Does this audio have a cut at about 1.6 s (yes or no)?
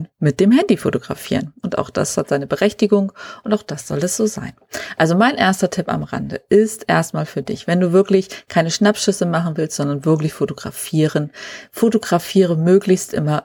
no